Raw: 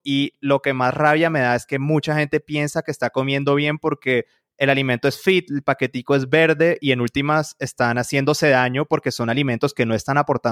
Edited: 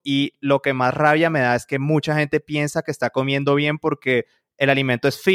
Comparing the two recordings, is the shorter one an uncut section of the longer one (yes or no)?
yes